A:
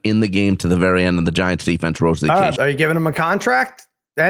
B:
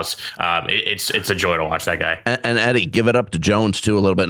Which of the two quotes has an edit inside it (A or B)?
A